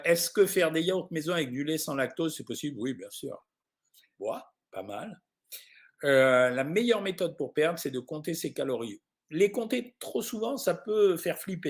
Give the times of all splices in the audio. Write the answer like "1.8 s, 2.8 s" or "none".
4.1 s

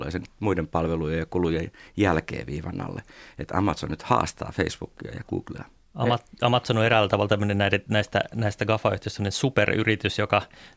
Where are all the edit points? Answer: none

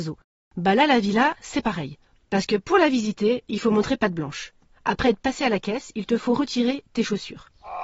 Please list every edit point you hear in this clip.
4.7 s

